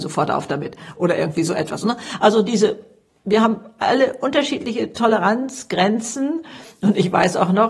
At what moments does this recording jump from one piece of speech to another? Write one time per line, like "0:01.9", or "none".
none